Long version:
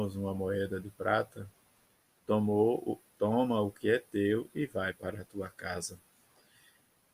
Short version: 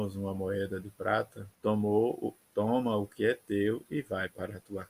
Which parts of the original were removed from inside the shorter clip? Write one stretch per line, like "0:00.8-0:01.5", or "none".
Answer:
0:01.5-0:02.2

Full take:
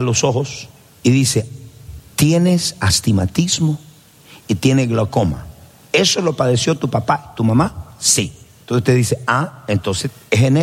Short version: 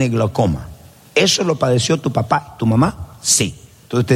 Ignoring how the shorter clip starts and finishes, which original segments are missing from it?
none

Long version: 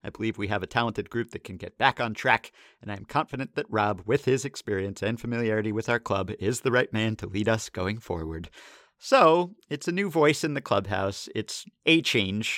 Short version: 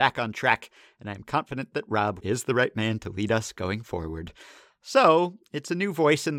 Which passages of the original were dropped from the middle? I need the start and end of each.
0:04.0-0:06.4

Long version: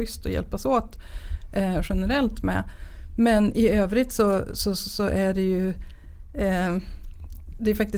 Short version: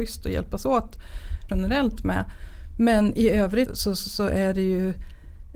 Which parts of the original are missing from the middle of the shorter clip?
0:01.5-0:01.9
0:04.1-0:04.5

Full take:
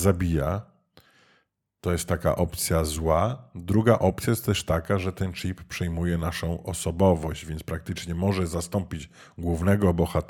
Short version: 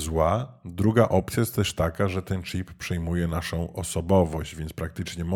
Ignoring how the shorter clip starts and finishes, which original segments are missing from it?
none

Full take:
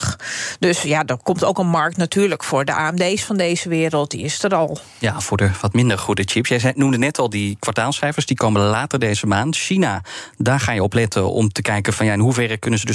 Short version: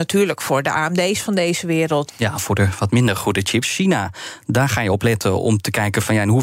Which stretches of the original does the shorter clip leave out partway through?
0:04.1-0:04.9
0:06.4-0:09.5

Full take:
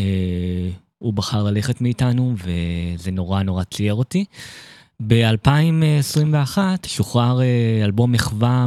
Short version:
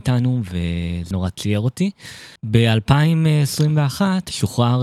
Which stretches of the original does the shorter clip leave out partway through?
0:03.0-0:03.5
0:04.7-0:04.9

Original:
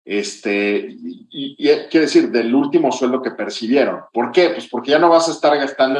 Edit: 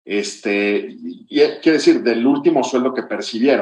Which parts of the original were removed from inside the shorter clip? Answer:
0:01.3-0:01.6

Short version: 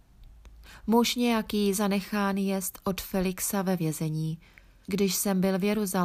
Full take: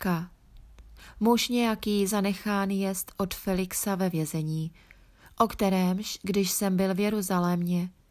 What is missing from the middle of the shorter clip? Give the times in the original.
0:05.2-0:06.2

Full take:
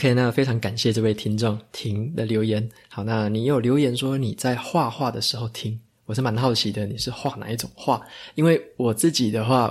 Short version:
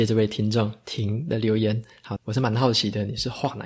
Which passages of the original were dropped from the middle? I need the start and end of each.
0:03.0-0:06.0

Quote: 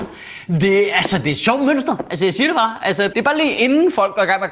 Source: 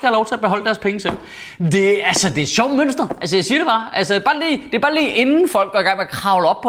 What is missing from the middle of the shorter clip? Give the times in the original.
0:04.2-0:04.7

